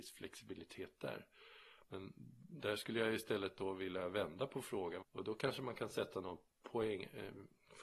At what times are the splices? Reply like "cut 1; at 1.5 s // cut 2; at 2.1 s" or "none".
cut 1; at 1.8 s // cut 2; at 5.0 s